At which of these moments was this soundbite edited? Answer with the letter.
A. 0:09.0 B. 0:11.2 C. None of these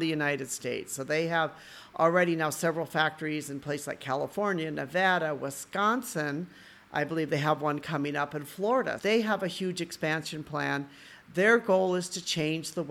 A